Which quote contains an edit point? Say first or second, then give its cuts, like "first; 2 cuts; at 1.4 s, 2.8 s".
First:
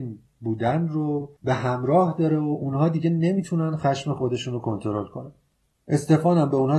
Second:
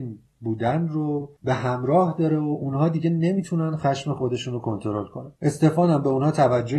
second; 1 cut; at 5.3 s